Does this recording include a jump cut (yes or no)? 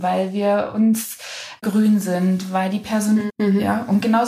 yes